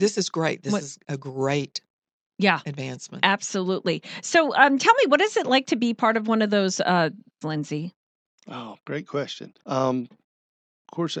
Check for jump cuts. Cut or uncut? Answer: cut